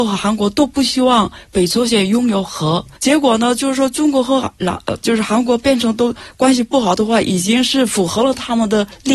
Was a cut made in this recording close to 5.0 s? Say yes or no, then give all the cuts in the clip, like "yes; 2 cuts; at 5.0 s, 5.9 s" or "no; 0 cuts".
no; 1 cut; at 3.0 s